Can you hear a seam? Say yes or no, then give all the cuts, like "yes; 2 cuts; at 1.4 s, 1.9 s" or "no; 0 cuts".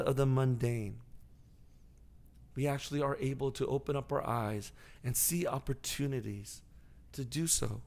no; 0 cuts